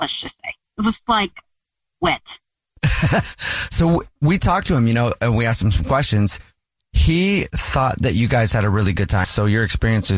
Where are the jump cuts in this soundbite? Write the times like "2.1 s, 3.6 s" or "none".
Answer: 9.2 s